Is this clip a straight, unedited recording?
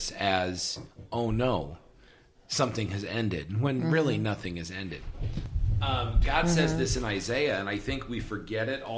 yes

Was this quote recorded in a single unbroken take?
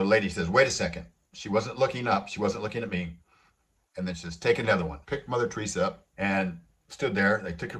no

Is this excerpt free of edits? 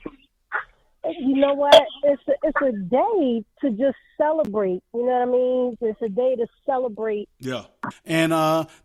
no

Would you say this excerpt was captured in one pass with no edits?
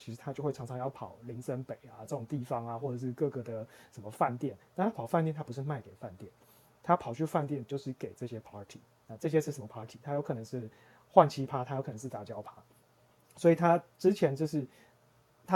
yes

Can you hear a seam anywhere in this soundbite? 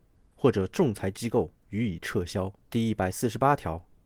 yes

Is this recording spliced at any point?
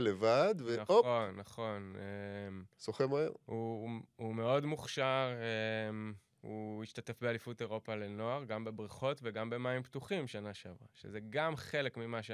no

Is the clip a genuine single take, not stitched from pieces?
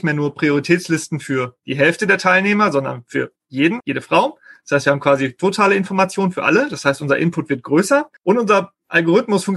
no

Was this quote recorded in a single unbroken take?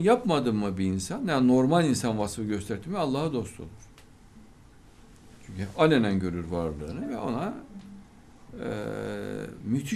yes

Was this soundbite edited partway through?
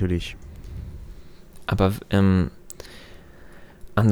no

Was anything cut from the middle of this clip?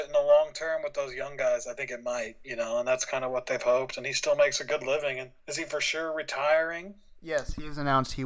yes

